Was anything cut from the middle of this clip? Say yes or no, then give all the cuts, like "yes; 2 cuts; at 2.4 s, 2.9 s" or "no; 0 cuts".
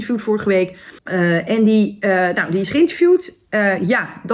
yes; 1 cut; at 1.0 s